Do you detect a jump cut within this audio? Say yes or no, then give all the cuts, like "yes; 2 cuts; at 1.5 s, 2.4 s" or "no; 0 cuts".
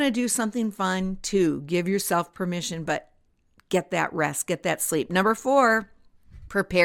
no; 0 cuts